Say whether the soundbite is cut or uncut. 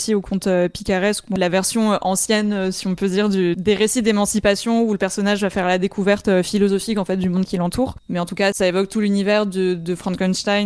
cut